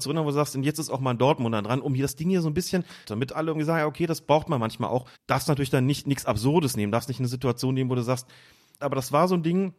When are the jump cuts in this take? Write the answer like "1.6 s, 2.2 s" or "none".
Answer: 3.0 s, 5.2 s, 8.8 s